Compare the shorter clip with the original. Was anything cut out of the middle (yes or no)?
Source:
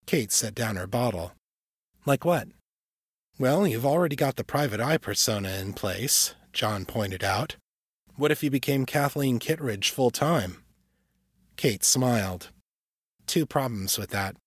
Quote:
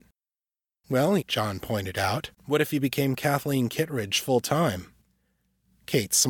yes